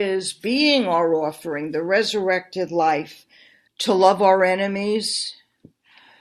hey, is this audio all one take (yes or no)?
no